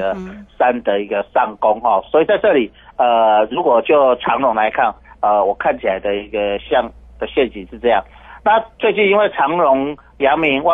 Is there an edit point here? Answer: no; 0 cuts

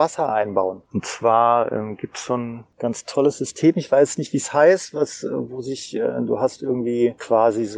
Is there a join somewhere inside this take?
no; 0 cuts

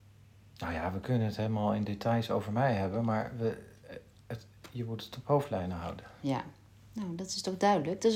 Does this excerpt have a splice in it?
no; 0 cuts

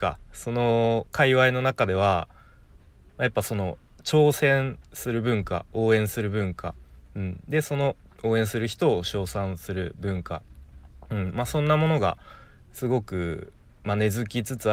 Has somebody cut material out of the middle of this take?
no; 0 cuts

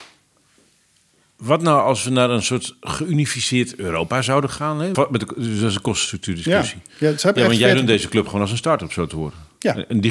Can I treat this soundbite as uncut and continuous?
no; 1 cut; at 4.9 s

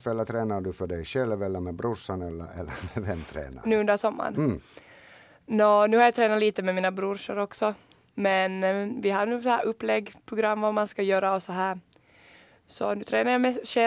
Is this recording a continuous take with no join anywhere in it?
yes; 0 cuts

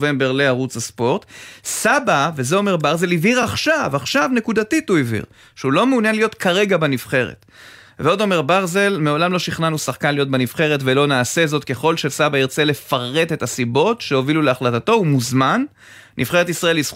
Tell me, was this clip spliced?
no; 0 cuts

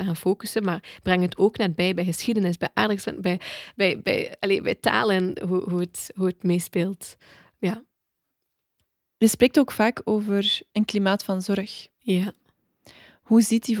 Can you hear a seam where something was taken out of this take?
no; 0 cuts

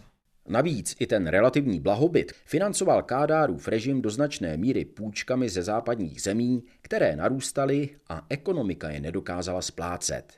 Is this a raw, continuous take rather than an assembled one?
no; 1 cut; at 2.3 s

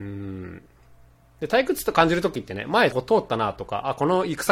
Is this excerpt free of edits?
no; 1 cut; at 2.9 s

